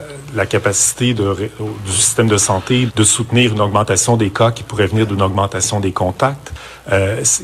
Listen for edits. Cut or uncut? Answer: cut